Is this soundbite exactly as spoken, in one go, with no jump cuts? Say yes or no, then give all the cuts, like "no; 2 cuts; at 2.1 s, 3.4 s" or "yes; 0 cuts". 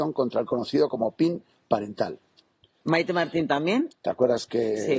no; 2 cuts; at 2.8 s, 3.9 s